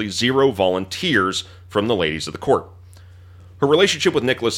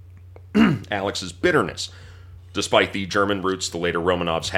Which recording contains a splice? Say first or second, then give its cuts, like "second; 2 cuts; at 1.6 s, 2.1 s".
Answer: second; 1 cut; at 2.4 s